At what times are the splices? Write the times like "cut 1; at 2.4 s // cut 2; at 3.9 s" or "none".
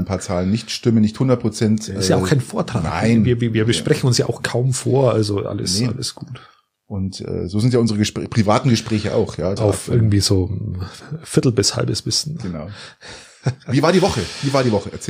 cut 1; at 9.6 s